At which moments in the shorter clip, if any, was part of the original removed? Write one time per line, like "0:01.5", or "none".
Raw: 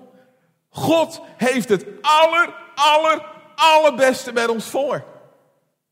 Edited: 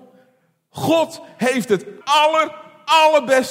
0:02.0